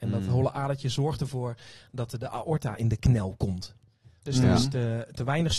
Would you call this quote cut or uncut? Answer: cut